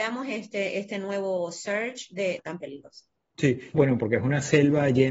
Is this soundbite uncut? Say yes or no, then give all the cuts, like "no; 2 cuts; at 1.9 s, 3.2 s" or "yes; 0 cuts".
no; 2 cuts; at 2.4 s, 3.7 s